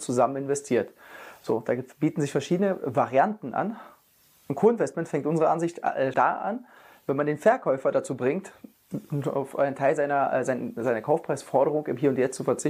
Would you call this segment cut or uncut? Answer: cut